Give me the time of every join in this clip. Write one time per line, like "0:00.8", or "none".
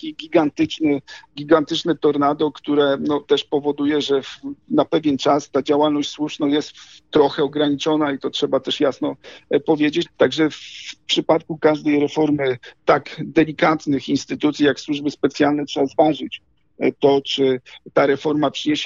0:10.0